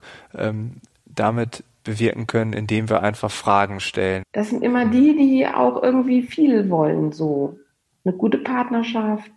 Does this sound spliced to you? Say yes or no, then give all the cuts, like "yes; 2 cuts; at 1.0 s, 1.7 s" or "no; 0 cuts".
yes; 1 cut; at 4.2 s